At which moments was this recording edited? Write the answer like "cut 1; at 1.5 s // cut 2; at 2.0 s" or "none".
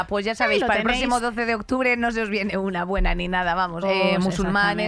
cut 1; at 3.8 s